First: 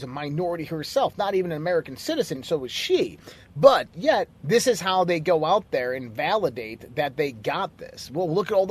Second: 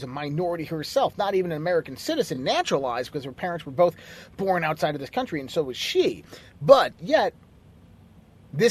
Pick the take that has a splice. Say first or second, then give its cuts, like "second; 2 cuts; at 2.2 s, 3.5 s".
first; 2 cuts; at 2.3 s, 4.3 s